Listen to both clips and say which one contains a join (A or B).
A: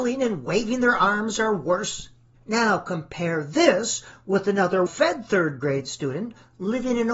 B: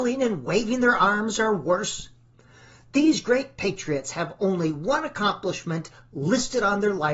A